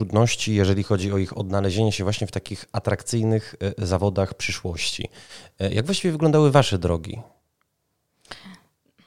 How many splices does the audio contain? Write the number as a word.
zero